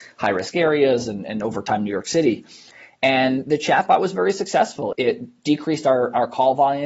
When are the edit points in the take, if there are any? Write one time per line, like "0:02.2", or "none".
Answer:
none